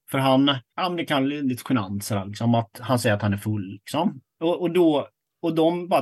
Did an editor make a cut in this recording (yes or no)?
yes